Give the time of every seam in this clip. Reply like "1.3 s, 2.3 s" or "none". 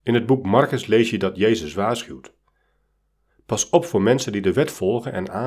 none